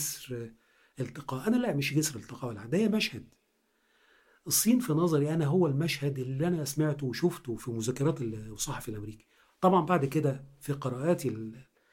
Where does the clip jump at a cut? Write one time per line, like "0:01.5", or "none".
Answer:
0:07.6